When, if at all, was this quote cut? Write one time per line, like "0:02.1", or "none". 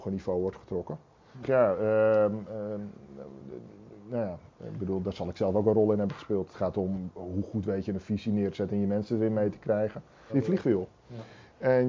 0:01.4
0:10.3

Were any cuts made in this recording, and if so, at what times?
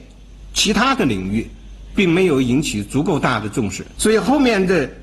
0:03.9

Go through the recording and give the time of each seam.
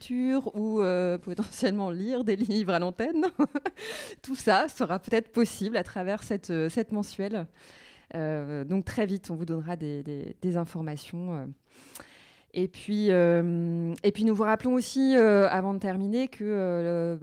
none

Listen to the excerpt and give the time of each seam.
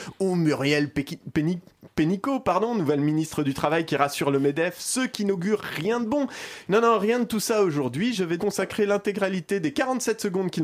0:06.7
0:08.4

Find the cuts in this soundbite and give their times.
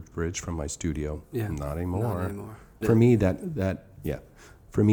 0:02.8

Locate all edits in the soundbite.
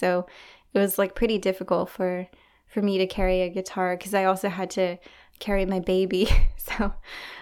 none

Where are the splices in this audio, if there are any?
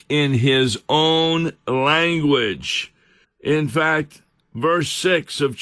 0:03.2

